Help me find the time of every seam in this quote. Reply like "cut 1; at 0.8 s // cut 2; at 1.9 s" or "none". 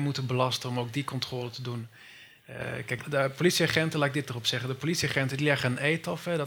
cut 1; at 3.0 s

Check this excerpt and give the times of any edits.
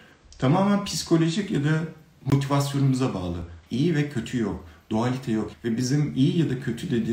cut 1; at 3.6 s // cut 2; at 5.5 s

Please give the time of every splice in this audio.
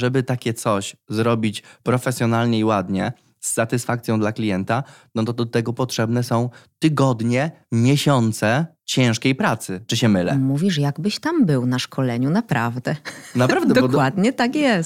none

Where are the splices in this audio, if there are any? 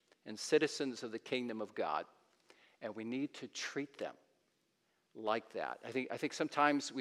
none

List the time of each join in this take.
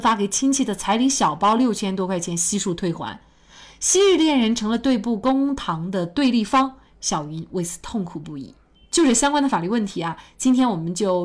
cut 1; at 8.7 s

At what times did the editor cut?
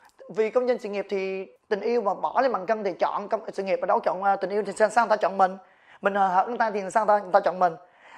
cut 1; at 1.6 s

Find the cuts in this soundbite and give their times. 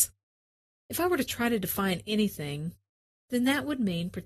none

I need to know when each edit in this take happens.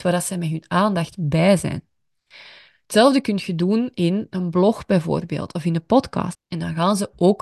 cut 1; at 6.3 s

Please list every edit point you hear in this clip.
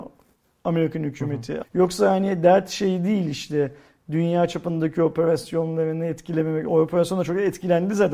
cut 1; at 1.6 s

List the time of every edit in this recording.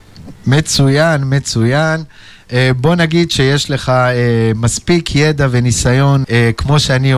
cut 1; at 6.2 s

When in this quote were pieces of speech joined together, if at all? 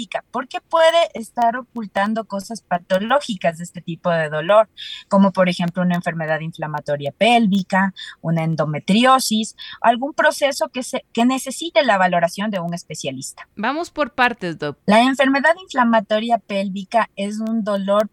cut 1; at 14.8 s

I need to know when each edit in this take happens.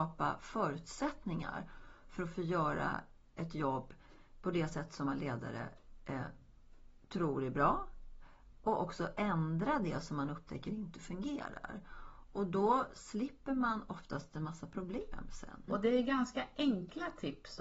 cut 1; at 15.7 s

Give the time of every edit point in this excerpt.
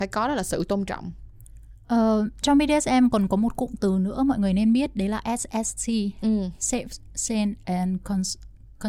none

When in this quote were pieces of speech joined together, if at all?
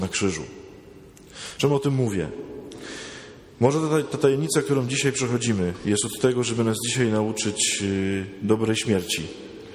none

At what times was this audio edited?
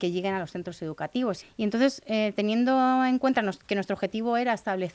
cut 1; at 1.4 s

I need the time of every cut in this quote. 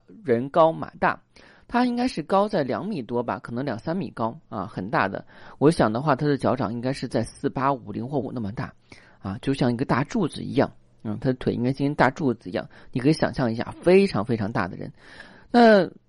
cut 1; at 8.2 s

